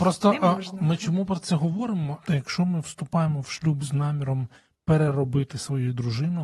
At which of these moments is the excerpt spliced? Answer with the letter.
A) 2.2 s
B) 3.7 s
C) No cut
A